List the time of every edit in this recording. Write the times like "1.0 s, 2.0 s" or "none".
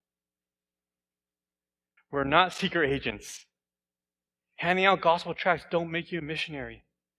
2.0 s, 4.6 s

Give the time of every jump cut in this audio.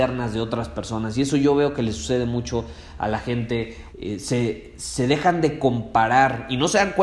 3.9 s

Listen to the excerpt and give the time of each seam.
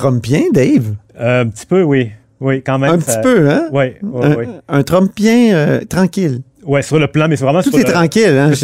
none

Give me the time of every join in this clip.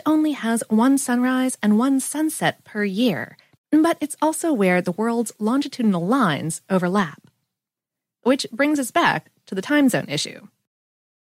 3.6 s

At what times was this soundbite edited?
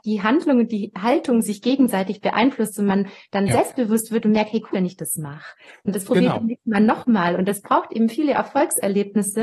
4.7 s

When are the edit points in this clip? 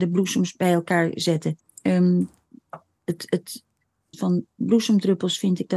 1.6 s, 4.1 s

